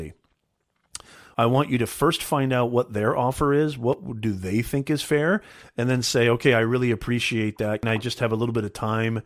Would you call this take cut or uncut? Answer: cut